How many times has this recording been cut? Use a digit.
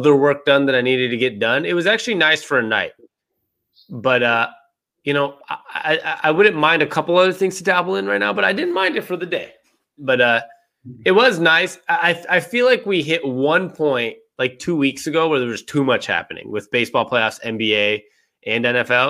2